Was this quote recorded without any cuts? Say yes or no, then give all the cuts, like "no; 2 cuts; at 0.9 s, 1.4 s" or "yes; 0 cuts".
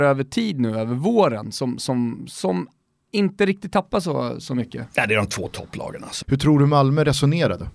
no; 1 cut; at 6.2 s